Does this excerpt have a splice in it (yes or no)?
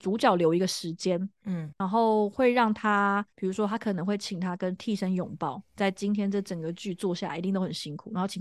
no